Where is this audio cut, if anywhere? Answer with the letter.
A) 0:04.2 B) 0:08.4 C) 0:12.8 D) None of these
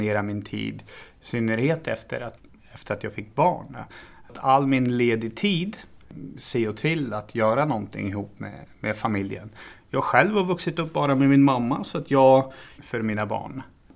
C